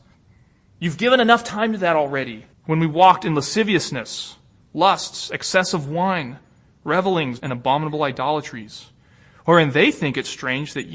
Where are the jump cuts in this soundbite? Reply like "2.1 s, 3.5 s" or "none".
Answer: 2.5 s, 7.4 s